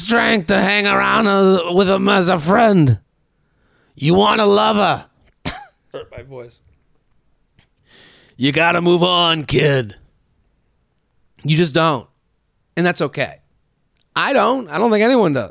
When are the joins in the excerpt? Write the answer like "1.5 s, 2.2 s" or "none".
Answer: 5.9 s